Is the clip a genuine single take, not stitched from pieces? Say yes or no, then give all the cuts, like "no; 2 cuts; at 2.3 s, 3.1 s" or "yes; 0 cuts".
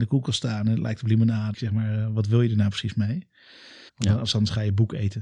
no; 2 cuts; at 1.5 s, 3.9 s